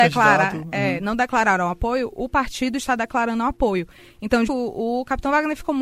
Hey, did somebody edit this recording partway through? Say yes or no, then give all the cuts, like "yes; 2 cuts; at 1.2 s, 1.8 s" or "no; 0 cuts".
yes; 1 cut; at 4.5 s